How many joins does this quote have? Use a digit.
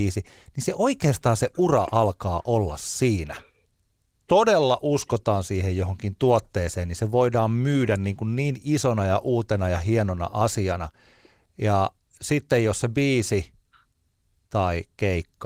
1